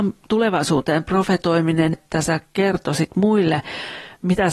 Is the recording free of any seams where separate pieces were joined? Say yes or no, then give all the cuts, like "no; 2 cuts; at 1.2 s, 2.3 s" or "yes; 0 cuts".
no; 1 cut; at 1.9 s